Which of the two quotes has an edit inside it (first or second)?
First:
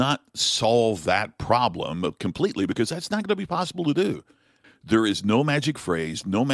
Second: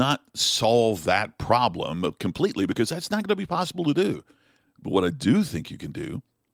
first